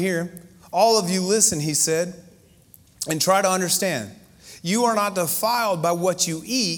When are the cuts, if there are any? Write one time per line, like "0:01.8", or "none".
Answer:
none